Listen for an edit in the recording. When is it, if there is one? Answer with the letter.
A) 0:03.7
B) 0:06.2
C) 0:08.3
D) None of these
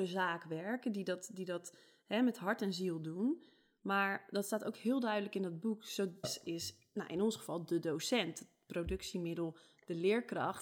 B